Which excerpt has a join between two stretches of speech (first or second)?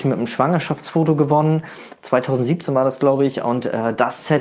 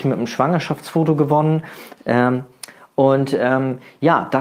second